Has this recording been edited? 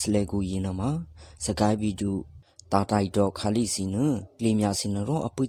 no; 0 cuts

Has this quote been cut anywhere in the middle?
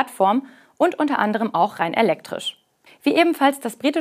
yes; 1 cut; at 2.9 s

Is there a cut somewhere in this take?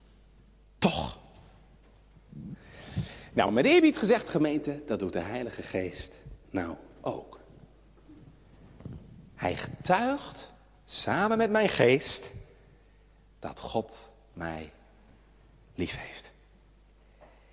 no; 0 cuts

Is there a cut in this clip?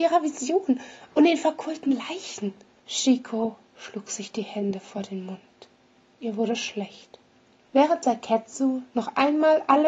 yes; 2 cuts; at 2.8 s, 7.7 s

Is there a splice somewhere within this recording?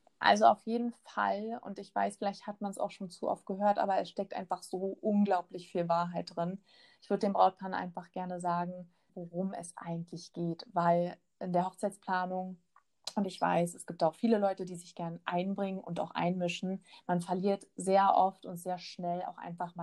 yes; 1 cut; at 9.1 s

